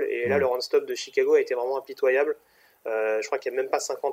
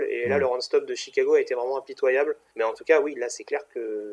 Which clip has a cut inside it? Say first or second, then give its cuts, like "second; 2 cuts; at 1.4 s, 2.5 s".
second; 1 cut; at 2.5 s